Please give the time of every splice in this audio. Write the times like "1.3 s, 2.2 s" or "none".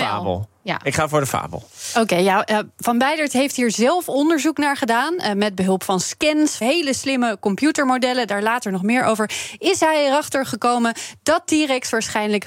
6.6 s